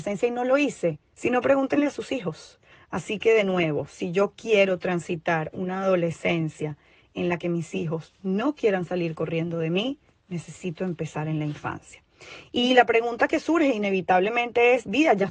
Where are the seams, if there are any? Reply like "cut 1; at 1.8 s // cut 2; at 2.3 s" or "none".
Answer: cut 1; at 1.1 s // cut 2; at 2.7 s